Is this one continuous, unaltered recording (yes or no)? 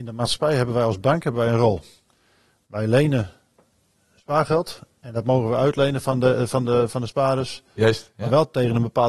yes